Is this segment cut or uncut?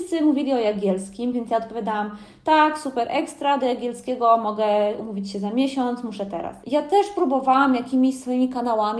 uncut